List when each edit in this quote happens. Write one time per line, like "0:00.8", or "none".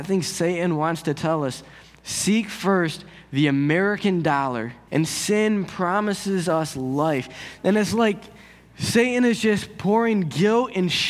0:04.9
0:07.6

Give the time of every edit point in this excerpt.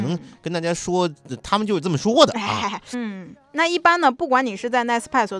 0:02.9

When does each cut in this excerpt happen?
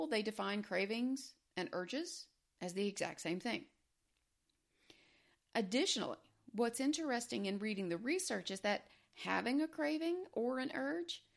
none

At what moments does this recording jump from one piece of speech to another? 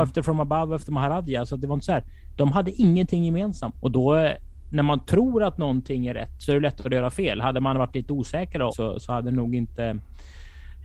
0:03.8
0:08.7

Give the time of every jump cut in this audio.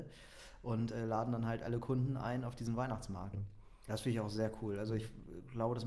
0:03.3

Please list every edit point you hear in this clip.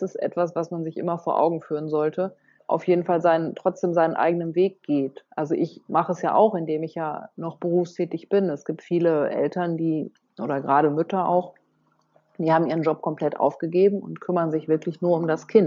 0:02.6

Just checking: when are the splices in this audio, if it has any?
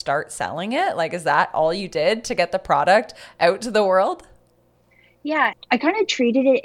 0:05.5

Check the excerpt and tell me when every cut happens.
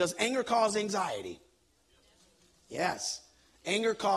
none

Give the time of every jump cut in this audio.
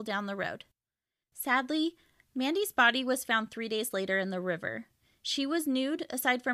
0:01.2

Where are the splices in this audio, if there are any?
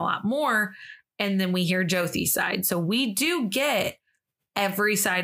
none

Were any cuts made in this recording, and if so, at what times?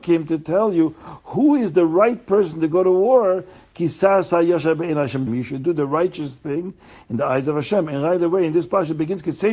0:05.3

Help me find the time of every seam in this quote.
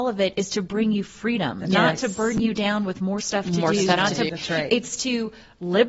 0:04.3

